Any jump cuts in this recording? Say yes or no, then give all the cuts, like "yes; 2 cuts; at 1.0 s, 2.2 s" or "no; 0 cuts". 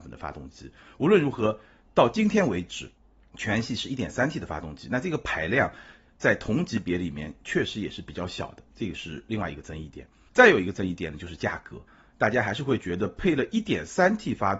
no; 0 cuts